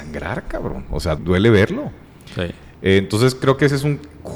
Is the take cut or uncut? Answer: cut